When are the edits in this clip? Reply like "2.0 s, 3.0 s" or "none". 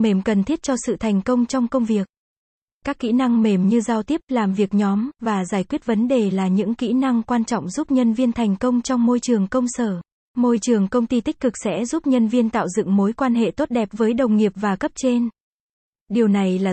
10.3 s

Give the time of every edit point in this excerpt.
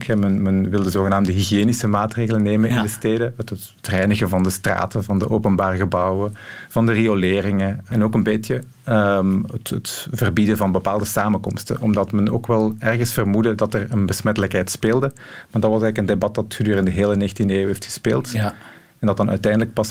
none

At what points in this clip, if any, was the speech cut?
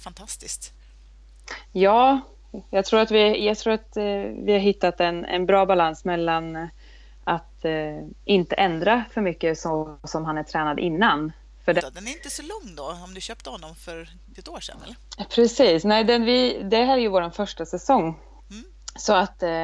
11.8 s

